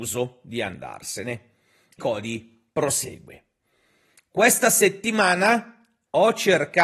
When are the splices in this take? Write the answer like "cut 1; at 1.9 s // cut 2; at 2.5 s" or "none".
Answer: cut 1; at 2.0 s

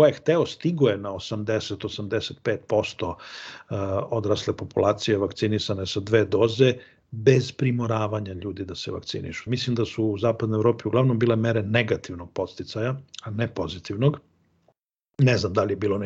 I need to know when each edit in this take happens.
cut 1; at 9.5 s

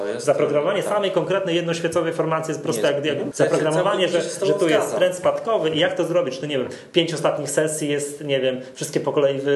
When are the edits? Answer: cut 1; at 3.3 s

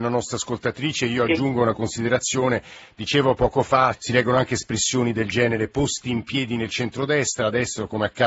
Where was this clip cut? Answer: cut 1; at 3.9 s

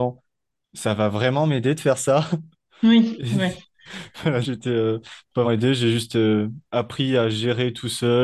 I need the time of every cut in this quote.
cut 1; at 4.4 s // cut 2; at 5.4 s

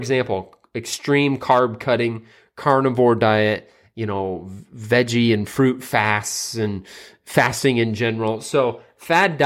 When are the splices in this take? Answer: none

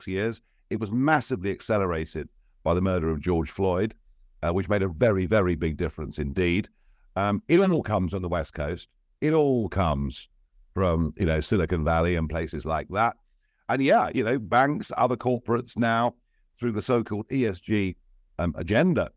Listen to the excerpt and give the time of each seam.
none

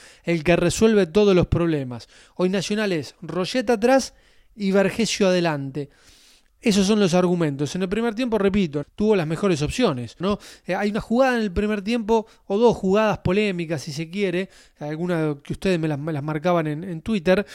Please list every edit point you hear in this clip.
cut 1; at 8.8 s // cut 2; at 10.2 s

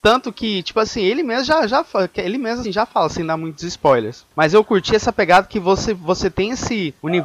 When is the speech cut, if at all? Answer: cut 1; at 2.6 s

